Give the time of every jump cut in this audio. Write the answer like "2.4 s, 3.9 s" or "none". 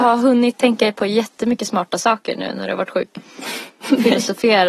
none